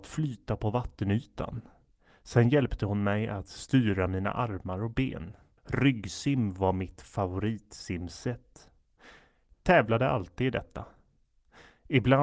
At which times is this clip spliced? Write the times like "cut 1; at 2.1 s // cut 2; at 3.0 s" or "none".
cut 1; at 5.6 s